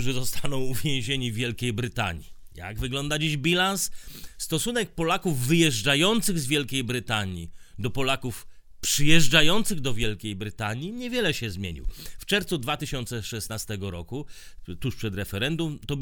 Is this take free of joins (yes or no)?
yes